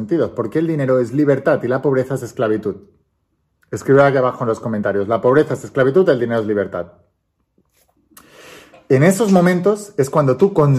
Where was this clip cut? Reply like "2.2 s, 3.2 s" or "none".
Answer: none